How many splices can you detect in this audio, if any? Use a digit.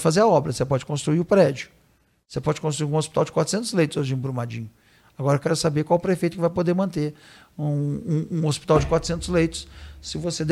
0